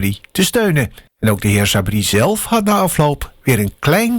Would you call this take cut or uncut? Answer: cut